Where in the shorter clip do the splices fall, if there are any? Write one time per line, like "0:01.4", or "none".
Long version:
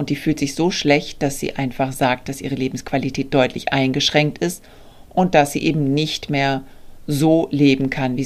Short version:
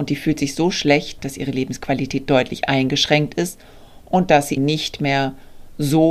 0:01.2
0:04.6